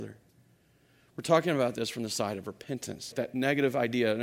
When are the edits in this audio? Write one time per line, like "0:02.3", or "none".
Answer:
0:03.1

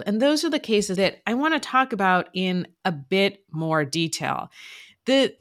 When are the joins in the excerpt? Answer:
0:01.0

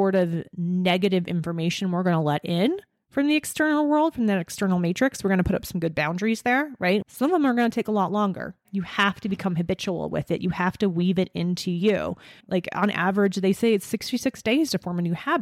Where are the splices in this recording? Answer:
0:07.0
0:08.6
0:12.4

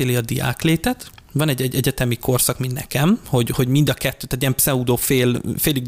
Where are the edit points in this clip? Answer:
none

